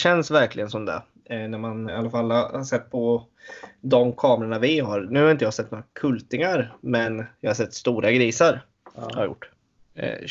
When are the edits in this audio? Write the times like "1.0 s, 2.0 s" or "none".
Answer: 1.9 s